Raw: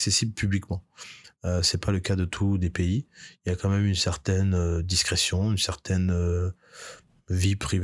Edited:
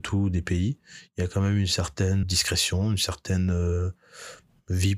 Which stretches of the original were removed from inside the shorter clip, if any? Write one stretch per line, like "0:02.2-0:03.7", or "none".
0:04.5-0:04.8